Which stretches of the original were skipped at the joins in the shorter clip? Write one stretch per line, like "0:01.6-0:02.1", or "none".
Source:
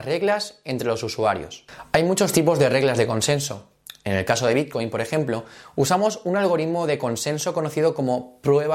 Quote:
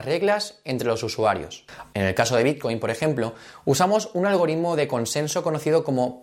0:01.9-0:04.0